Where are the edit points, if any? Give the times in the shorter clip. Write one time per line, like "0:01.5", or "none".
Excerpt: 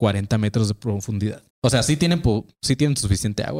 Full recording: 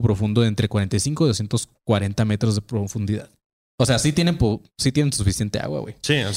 0:01.5